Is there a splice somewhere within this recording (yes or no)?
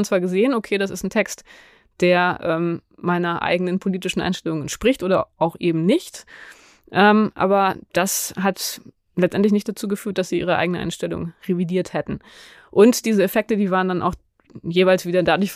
no